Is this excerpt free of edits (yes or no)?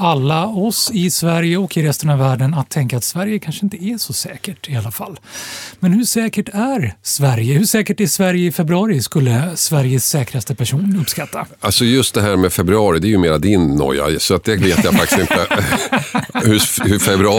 yes